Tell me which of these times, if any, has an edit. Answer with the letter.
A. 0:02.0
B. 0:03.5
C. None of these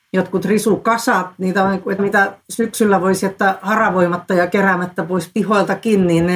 A